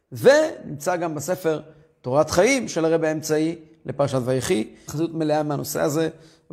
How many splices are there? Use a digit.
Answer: 1